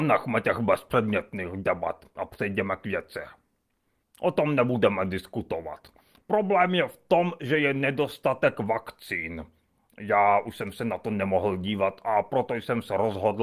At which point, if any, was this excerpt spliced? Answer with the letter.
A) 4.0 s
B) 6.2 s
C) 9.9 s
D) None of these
A